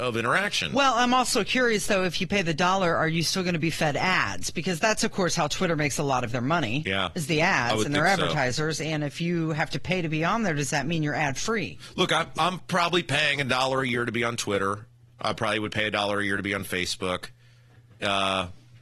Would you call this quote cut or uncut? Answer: uncut